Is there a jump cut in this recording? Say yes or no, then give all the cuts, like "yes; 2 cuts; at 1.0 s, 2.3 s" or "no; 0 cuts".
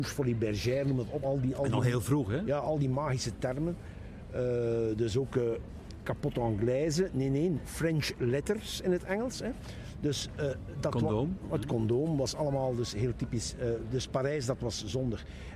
no; 0 cuts